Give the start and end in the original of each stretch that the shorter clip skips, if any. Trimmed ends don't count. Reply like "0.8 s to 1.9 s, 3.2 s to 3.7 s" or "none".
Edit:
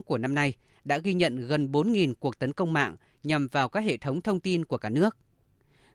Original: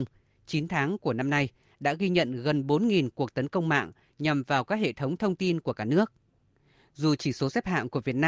none